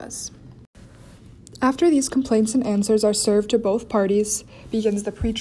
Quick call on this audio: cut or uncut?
uncut